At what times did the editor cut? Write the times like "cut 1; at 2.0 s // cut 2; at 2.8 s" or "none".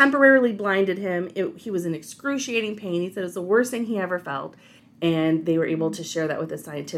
cut 1; at 4.8 s

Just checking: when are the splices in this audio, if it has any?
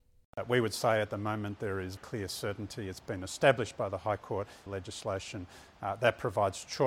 cut 1; at 2.0 s // cut 2; at 4.7 s

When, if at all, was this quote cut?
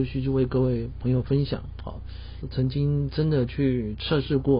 cut 1; at 2.4 s

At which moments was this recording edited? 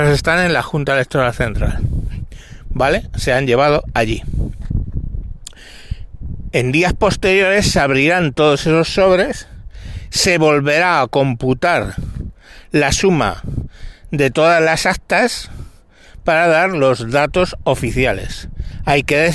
none

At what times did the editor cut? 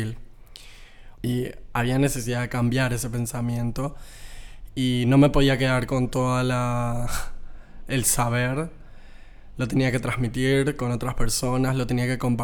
cut 1; at 1.2 s

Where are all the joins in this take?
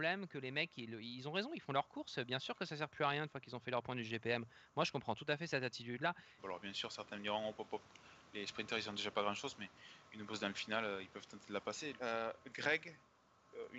cut 1; at 6.4 s // cut 2; at 12.0 s

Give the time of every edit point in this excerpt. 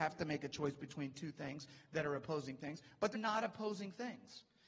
cut 1; at 3.1 s

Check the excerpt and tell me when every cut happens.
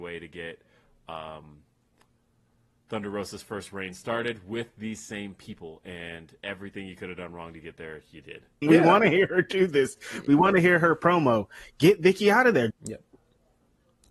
cut 1; at 8.6 s // cut 2; at 12.7 s

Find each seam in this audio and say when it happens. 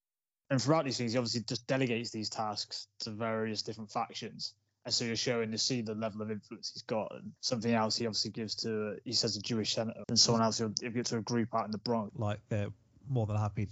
cut 1; at 7.4 s // cut 2; at 10.0 s // cut 3; at 12.1 s

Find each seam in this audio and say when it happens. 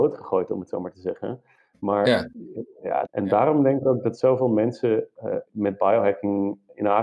cut 1; at 3.0 s // cut 2; at 5.5 s

